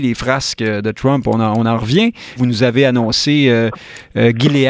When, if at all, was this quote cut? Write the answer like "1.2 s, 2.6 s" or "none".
2.4 s